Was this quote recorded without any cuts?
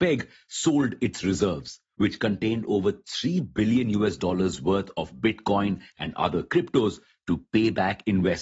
yes; 0 cuts

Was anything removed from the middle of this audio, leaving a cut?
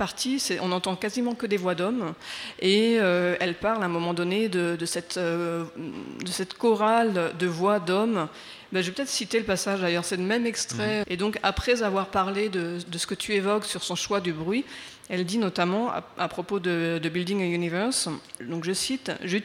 yes; 1 cut; at 11.0 s

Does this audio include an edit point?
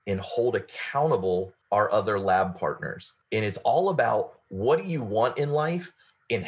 no; 0 cuts

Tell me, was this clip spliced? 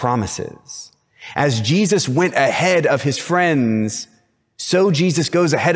no; 0 cuts

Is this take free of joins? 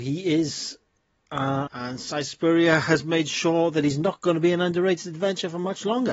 no; 1 cut; at 1.7 s

